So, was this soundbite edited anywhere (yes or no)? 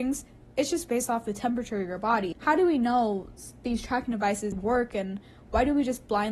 yes